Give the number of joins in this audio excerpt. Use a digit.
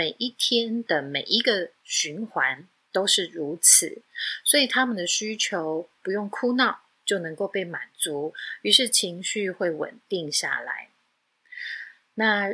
0